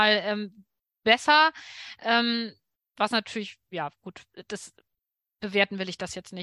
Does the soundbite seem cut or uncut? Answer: uncut